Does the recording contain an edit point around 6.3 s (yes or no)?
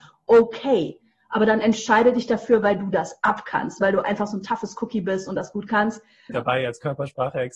yes